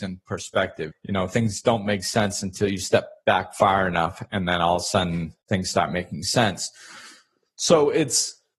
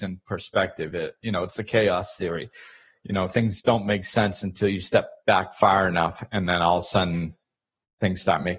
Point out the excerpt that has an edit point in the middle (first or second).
first